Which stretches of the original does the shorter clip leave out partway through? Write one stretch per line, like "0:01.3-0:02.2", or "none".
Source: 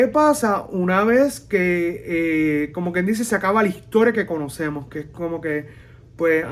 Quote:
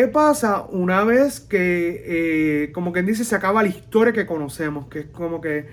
none

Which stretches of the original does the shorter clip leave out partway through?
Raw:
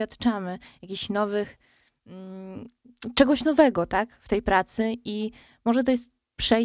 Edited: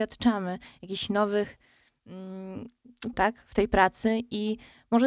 0:03.1-0:03.9

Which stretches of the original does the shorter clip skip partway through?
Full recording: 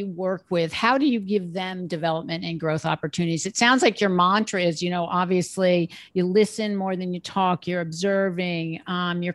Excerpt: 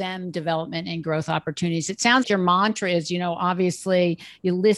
0:03.8-0:03.9

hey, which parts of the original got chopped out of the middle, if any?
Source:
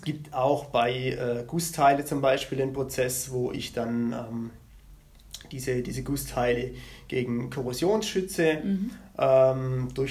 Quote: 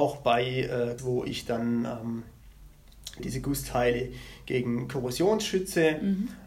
0:01.5-0:03.3
0:05.5-0:05.8

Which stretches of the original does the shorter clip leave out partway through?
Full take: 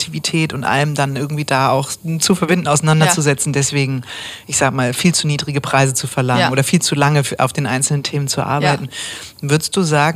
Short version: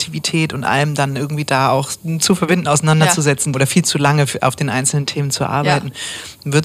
0:03.5-0:06.5

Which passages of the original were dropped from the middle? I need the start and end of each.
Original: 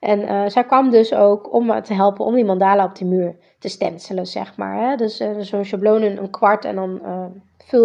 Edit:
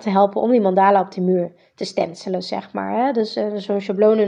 none

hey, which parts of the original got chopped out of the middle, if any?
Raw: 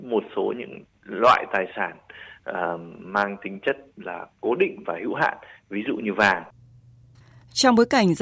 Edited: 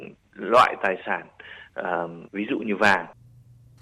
0:02.9-0:05.6

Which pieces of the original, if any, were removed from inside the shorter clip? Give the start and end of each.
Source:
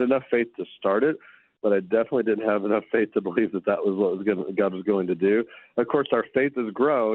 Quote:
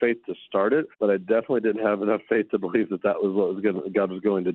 0:01.2-0:01.6

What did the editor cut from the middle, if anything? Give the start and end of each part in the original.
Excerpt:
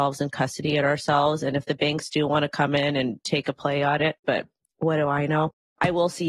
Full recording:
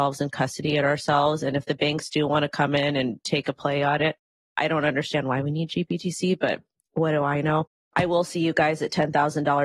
0:04.2-0:06.4

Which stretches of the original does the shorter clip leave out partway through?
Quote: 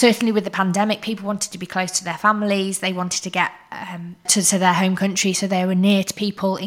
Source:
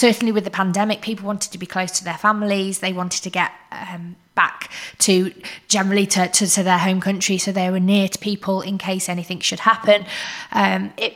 0:04.3-0:06.3

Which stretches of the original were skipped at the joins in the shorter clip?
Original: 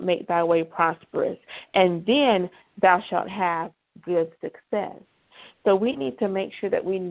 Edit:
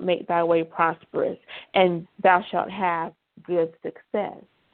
0:02.0-0:02.6

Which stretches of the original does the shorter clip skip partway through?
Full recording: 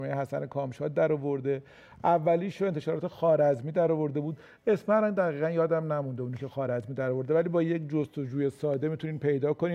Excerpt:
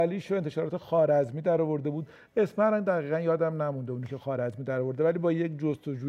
none

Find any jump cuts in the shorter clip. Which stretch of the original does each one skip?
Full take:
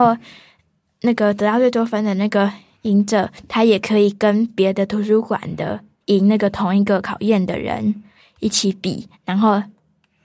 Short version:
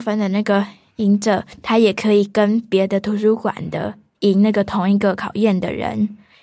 none

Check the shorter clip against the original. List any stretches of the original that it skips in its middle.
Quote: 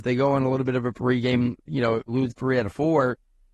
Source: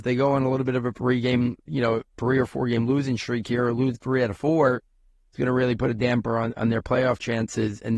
0:02.1-0:03.7

